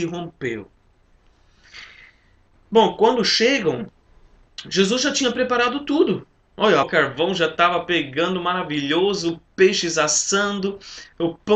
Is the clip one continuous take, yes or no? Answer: no